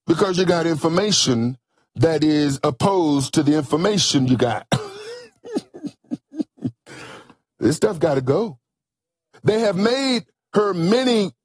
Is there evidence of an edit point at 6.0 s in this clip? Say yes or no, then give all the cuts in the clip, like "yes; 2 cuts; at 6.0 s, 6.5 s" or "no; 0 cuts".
no; 1 cut; at 9.3 s